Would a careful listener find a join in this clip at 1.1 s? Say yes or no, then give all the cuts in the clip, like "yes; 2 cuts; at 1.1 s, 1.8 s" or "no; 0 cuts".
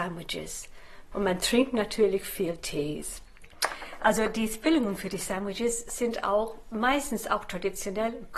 yes; 1 cut; at 1.1 s